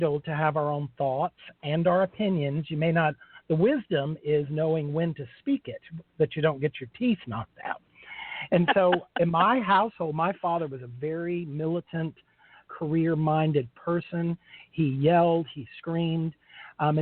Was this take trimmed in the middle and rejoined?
yes; 1 cut; at 12.7 s

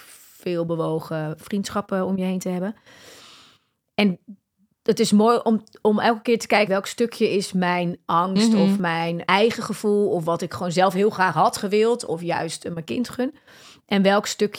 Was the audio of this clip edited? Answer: yes; 2 cuts; at 6.7 s, 9.3 s

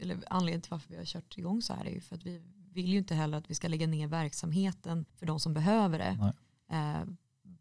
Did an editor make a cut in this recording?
yes; 1 cut; at 5.1 s

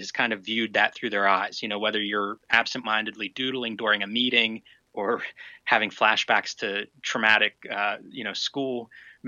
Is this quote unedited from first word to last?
yes; 0 cuts

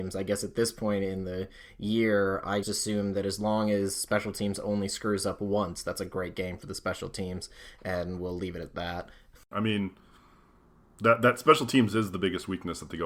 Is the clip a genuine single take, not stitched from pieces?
no; 2 cuts; at 2.6 s, 9.5 s

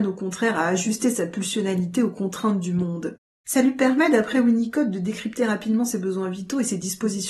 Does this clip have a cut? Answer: yes; 1 cut; at 3.4 s

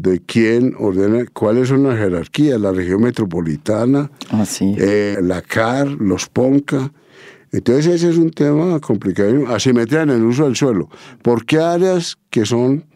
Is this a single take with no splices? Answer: no; 1 cut; at 5.1 s

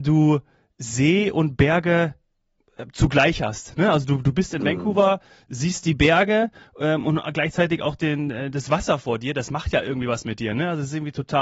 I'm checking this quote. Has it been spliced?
no; 0 cuts

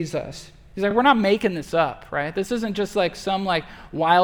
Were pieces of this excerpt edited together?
no; 0 cuts

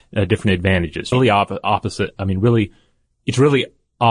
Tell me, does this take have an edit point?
yes; 1 cut; at 1.1 s

